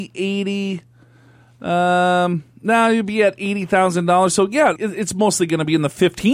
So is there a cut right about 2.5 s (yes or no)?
no